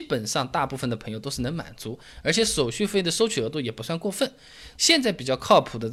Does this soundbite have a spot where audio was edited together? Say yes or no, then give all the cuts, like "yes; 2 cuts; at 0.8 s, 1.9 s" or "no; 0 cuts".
yes; 1 cut; at 4.8 s